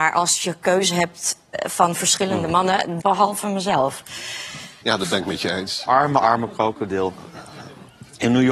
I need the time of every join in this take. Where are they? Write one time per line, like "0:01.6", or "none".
0:03.0
0:04.8